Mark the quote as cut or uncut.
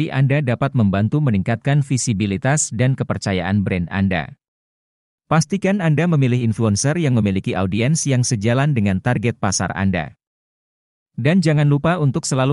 uncut